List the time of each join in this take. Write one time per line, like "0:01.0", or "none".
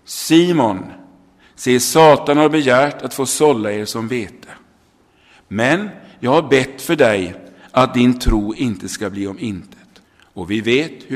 0:10.0